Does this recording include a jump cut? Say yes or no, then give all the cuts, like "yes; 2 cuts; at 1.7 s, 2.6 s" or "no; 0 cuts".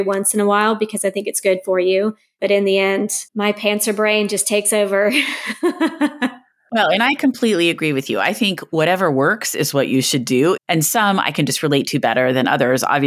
yes; 2 cuts; at 3.3 s, 10.6 s